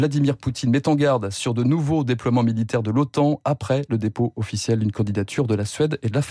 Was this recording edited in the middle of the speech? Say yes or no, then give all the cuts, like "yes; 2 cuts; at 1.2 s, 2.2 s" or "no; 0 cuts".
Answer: no; 0 cuts